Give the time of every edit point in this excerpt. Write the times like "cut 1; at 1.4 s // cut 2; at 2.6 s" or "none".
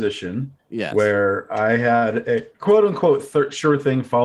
cut 1; at 2.5 s